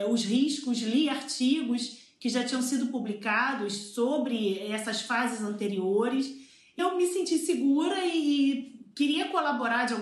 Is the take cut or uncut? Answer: cut